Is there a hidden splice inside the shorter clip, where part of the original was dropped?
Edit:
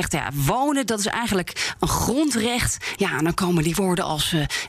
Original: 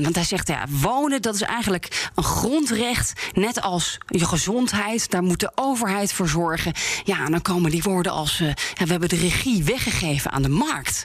yes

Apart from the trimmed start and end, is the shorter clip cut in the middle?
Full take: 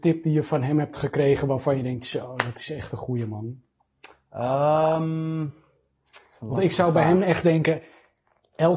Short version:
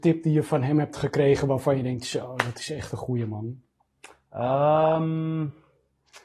no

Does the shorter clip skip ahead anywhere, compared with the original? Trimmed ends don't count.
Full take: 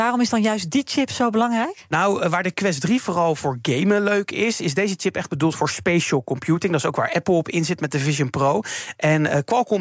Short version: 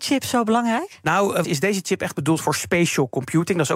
yes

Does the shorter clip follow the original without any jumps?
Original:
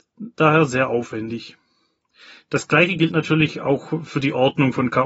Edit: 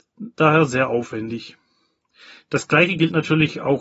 yes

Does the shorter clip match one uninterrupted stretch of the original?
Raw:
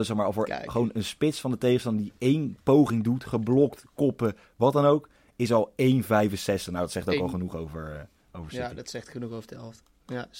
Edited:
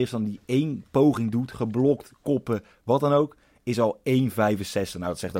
yes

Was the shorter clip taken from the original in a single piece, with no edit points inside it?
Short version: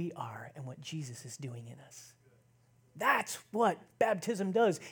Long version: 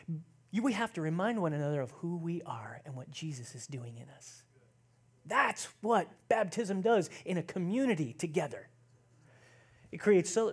yes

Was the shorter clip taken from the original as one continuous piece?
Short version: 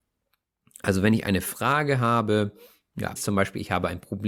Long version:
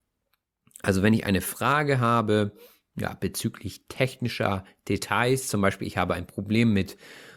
no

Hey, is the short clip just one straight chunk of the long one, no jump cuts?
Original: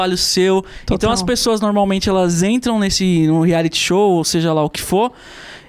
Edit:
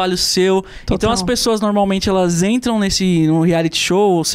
yes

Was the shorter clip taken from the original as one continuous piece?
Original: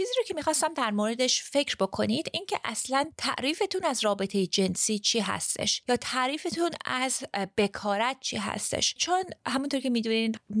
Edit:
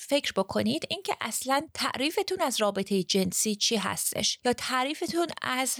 yes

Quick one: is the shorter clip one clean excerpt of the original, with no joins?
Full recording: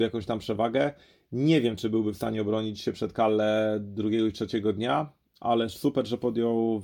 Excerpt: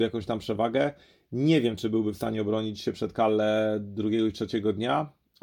yes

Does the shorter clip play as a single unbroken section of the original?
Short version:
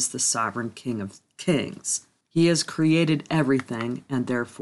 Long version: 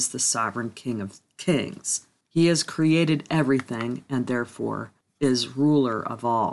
yes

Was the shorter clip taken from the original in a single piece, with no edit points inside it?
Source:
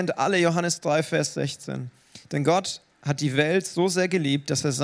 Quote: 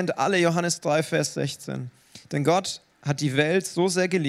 yes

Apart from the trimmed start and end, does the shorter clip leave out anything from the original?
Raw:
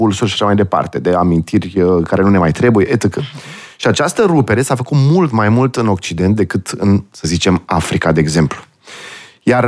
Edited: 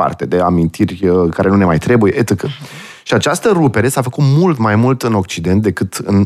no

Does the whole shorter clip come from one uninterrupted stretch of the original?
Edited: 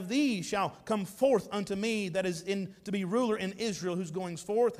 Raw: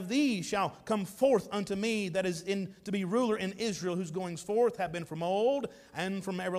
yes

